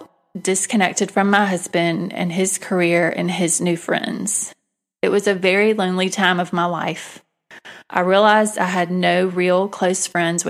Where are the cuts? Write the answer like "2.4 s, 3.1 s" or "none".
none